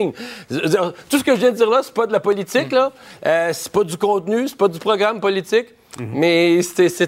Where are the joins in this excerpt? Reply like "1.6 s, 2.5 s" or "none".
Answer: none

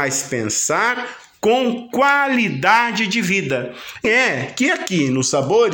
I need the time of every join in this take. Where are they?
4.0 s

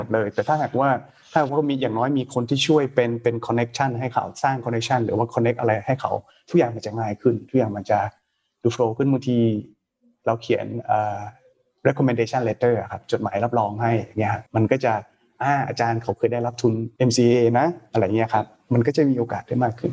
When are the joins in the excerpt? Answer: 14.5 s, 17.0 s

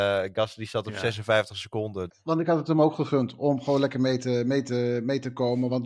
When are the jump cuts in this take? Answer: 2.1 s

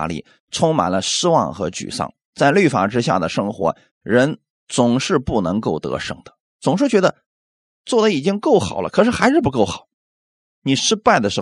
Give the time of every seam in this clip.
10.4 s

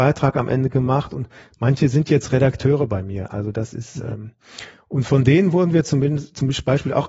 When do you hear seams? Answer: none

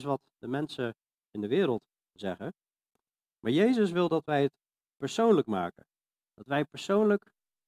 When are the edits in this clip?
none

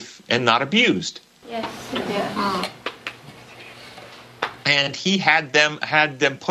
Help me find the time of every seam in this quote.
4.6 s

